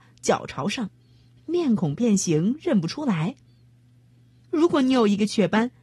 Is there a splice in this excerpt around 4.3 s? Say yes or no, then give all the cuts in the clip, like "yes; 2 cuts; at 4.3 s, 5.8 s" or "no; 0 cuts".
no; 1 cut; at 1.4 s